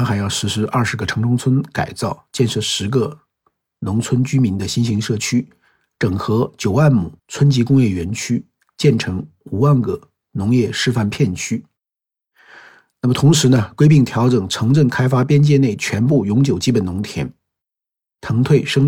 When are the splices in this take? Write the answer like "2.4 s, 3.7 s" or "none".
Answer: 7.2 s, 8.7 s